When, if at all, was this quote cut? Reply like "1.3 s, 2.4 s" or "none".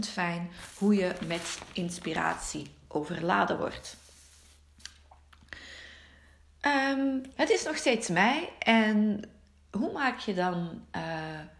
7.3 s

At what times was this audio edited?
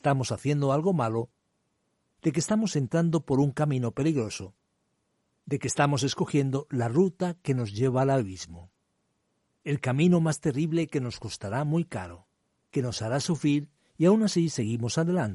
none

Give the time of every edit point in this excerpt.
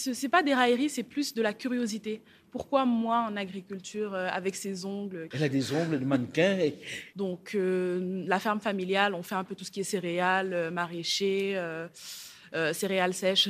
5.3 s, 7.1 s

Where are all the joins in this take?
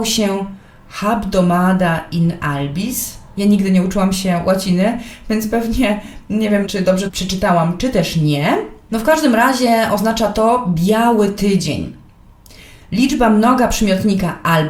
6.7 s

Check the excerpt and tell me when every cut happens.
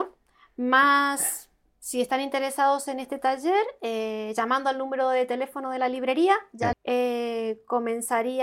6.7 s

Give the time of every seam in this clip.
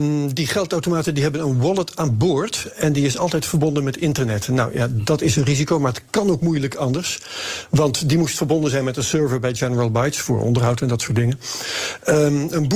none

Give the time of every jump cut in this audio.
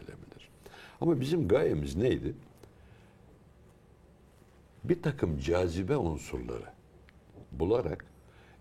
7.4 s

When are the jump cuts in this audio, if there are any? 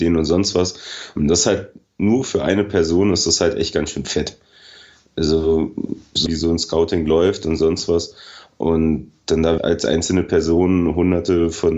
6.3 s, 9.6 s

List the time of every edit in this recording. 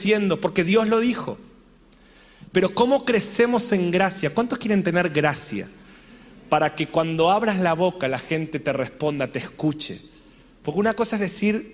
none

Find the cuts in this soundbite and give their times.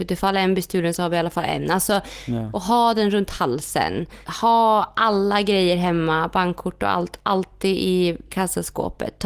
none

